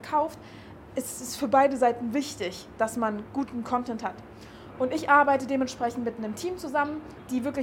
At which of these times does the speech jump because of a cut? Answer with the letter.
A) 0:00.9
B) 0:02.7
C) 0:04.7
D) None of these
D